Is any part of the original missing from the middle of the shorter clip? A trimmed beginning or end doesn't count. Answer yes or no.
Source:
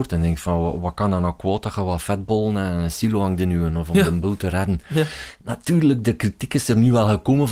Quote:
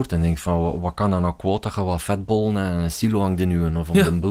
no